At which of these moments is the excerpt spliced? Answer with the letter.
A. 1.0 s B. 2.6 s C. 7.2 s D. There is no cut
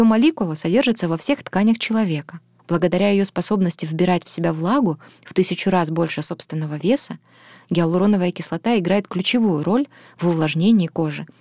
B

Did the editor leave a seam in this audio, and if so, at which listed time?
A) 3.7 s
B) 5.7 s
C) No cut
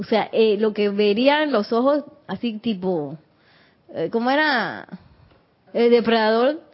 B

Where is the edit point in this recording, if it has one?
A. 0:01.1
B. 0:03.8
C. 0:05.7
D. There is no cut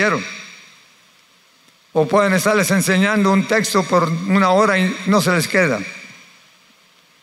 D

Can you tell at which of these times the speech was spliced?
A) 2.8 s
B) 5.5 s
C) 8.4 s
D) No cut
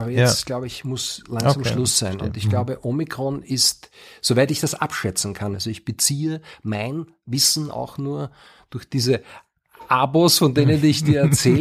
B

